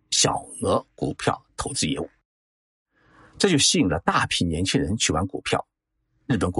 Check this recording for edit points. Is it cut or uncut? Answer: uncut